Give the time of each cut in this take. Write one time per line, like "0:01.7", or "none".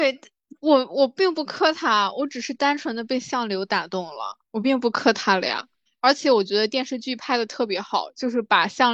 0:05.9